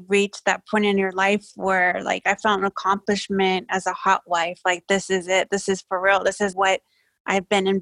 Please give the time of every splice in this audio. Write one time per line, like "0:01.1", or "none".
0:06.5